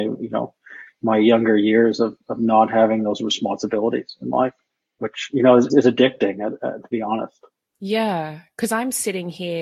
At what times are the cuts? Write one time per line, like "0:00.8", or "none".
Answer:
0:05.7